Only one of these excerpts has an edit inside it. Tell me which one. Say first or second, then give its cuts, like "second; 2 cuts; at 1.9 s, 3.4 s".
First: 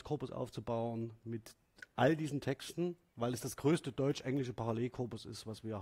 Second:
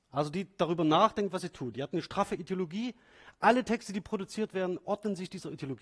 first; 1 cut; at 3.1 s